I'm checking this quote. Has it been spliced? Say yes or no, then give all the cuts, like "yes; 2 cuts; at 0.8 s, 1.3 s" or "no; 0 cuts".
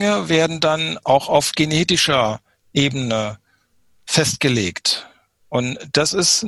no; 0 cuts